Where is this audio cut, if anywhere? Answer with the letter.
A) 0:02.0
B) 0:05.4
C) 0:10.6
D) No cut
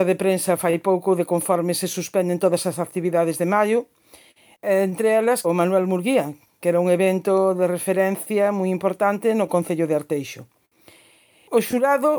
B